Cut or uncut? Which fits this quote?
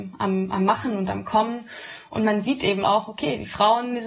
cut